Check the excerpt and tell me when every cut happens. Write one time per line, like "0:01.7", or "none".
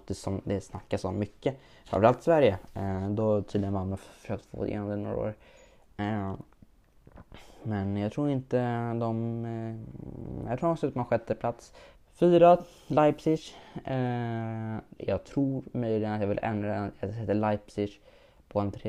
0:11.9
0:15.0